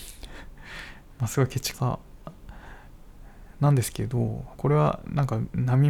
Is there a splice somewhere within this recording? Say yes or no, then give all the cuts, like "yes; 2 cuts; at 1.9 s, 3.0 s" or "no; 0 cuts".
yes; 2 cuts; at 1.7 s, 4.6 s